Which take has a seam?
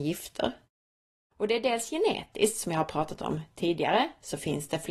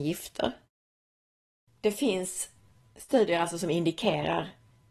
first; 1 cut; at 1.3 s

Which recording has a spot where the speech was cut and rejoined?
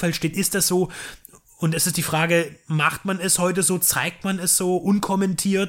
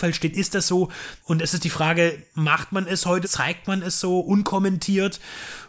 second; 2 cuts; at 1.2 s, 3.2 s

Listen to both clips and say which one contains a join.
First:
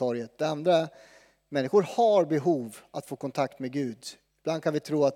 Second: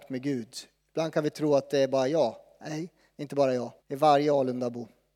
second; 1 cut; at 3.8 s

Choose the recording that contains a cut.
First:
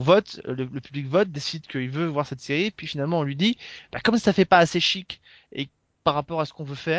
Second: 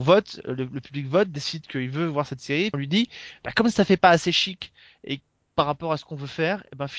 second; 1 cut; at 2.7 s

